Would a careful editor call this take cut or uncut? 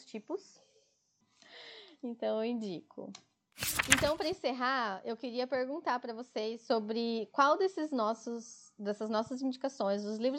cut